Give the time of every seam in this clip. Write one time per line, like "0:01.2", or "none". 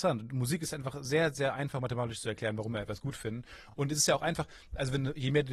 none